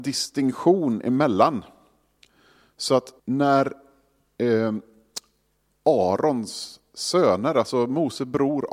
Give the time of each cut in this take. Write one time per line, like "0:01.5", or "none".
0:03.2